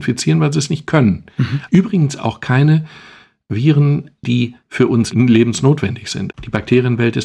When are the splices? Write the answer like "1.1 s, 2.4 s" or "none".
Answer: 1.7 s, 4.2 s